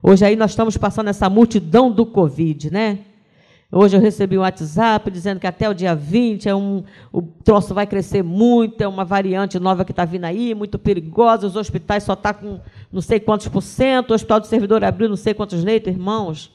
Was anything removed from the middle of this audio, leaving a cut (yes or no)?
no